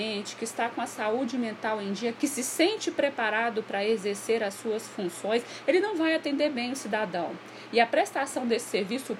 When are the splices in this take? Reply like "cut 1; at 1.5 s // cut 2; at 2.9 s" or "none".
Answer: cut 1; at 2.2 s // cut 2; at 5.7 s

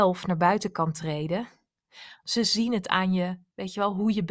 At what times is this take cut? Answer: cut 1; at 2.2 s

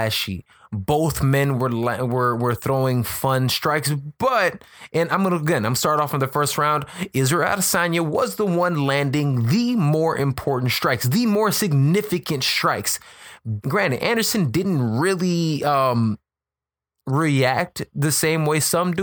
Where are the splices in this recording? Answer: cut 1; at 13.6 s

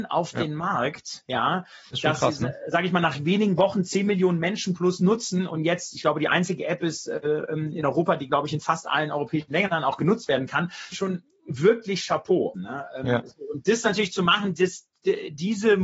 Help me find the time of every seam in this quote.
cut 1; at 10.9 s // cut 2; at 12.5 s

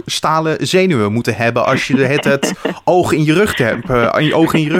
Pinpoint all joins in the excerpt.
none

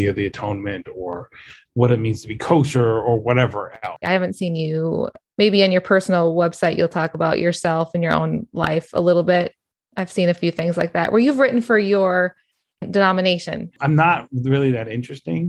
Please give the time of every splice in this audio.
cut 1; at 4.0 s

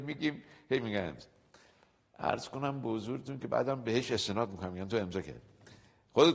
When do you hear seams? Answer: none

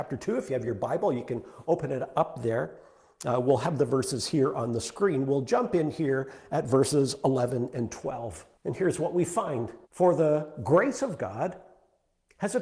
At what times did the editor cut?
cut 1; at 8.5 s // cut 2; at 9.8 s

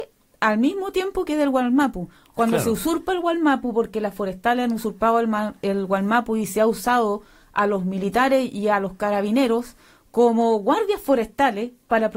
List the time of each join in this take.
none

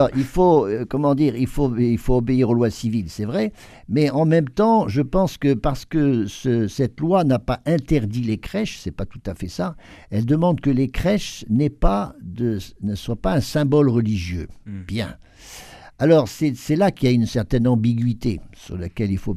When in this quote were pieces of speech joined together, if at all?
none

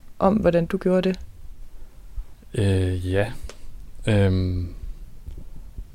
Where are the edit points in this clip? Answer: none

